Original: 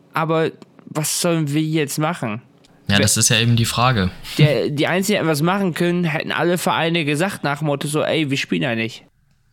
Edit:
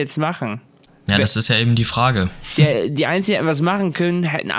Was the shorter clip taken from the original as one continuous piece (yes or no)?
yes